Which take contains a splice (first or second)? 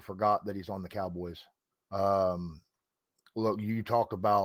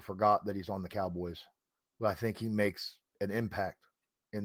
first